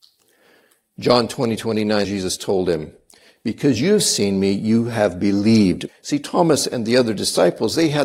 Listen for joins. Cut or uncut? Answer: cut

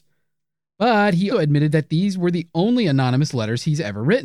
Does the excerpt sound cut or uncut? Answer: cut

